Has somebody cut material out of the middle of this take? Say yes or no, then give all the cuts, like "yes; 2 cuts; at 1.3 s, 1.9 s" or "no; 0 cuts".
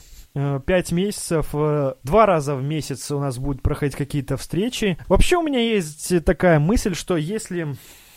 yes; 1 cut; at 5.0 s